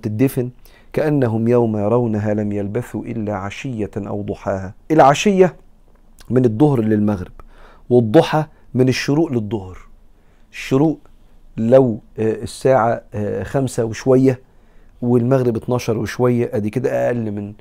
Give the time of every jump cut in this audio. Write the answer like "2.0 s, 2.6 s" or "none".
4.8 s

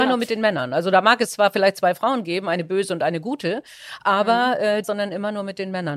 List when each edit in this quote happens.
4.8 s

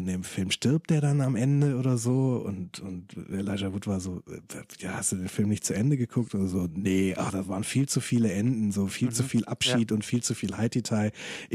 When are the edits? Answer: none

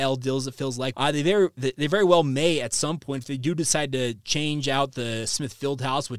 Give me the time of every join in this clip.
0.9 s

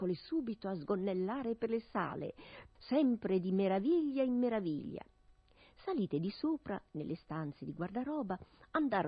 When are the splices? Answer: 2.8 s

